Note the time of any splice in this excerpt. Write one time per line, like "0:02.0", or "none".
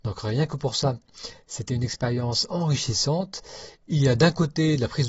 0:03.8